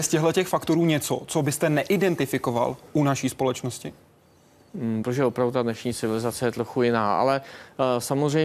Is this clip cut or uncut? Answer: cut